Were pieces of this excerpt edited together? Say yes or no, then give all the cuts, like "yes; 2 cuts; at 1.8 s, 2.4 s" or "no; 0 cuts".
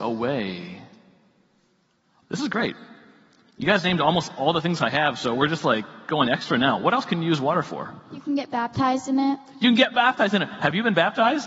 yes; 1 cut; at 2.2 s